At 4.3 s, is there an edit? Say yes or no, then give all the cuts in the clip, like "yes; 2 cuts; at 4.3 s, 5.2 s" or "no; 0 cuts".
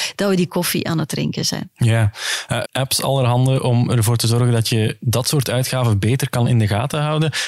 no; 1 cut; at 2.6 s